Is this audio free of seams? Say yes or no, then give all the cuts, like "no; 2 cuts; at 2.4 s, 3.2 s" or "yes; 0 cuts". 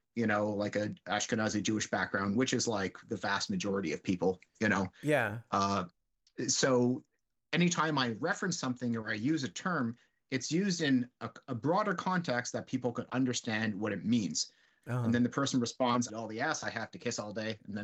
no; 2 cuts; at 14.8 s, 16.1 s